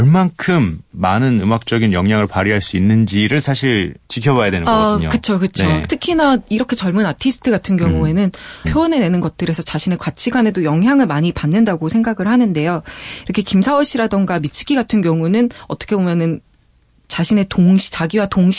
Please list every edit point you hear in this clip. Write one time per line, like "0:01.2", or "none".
0:04.0
0:08.6